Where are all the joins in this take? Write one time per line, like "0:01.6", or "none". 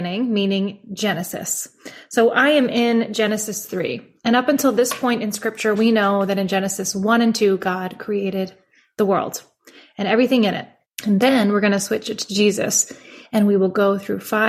0:10.9